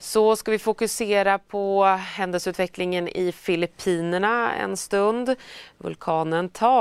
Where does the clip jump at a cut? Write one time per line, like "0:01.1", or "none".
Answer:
none